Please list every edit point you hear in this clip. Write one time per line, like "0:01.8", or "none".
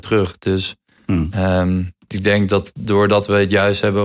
0:02.0

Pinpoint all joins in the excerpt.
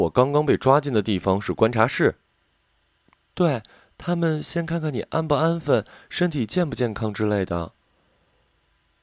none

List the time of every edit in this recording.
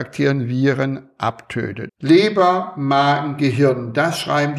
0:01.9

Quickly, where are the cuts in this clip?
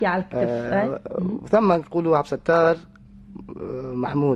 none

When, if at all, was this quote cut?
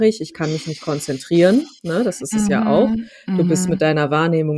none

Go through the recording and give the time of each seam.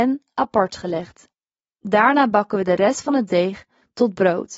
none

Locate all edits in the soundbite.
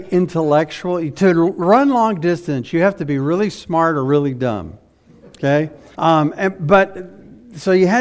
0:05.9

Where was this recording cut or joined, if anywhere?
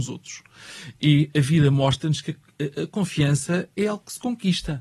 0:03.8

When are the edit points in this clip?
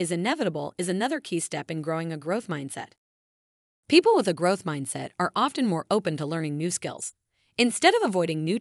none

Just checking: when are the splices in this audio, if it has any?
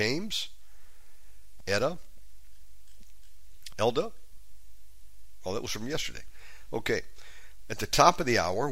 0:01.6
0:03.7

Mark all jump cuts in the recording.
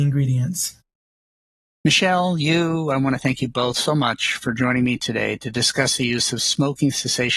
none

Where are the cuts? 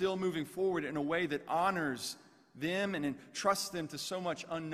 none

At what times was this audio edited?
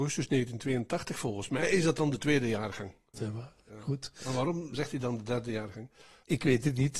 0:03.1

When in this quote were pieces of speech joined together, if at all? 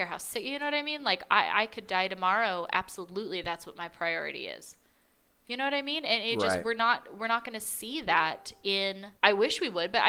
0:09.2

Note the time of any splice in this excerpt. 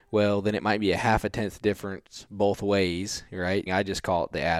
0:03.7

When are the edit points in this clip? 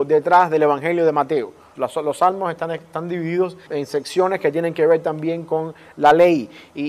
0:01.7
0:03.7

